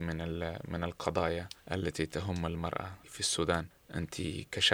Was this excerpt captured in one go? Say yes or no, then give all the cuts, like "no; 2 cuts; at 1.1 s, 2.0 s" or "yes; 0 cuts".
no; 2 cuts; at 1.6 s, 3.0 s